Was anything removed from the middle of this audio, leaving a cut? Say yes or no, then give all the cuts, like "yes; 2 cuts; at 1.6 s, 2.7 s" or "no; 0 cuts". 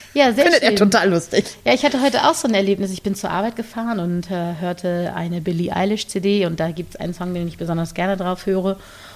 no; 0 cuts